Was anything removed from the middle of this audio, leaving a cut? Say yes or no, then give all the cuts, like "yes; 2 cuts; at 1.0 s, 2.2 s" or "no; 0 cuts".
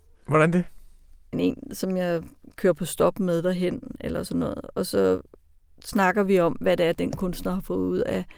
yes; 1 cut; at 1.3 s